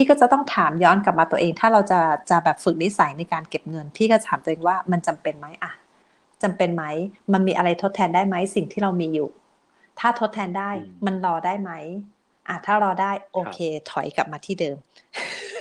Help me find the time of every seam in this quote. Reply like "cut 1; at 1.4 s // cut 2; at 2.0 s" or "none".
none